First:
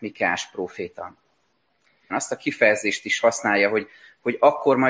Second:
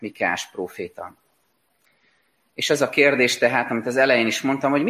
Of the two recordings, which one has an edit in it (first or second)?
first